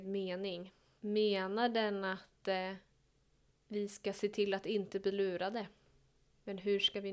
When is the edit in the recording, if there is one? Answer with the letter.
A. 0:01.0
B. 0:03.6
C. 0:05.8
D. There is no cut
A